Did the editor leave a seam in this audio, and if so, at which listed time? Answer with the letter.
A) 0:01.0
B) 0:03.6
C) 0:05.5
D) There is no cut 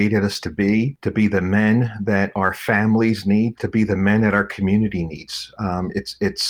B